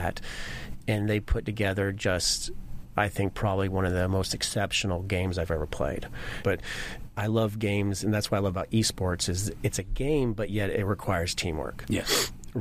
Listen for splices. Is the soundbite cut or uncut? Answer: cut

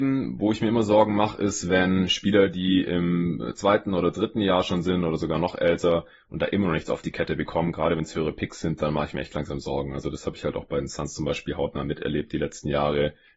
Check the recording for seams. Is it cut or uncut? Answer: uncut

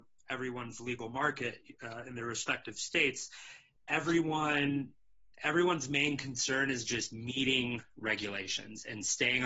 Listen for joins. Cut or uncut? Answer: uncut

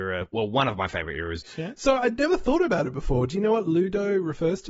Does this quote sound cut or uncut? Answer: cut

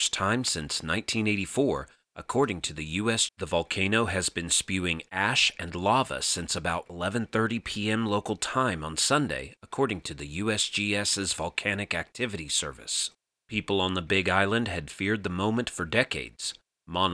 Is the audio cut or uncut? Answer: cut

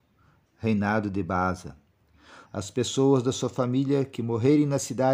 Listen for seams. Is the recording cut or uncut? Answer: cut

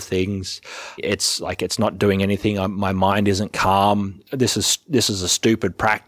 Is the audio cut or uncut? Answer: cut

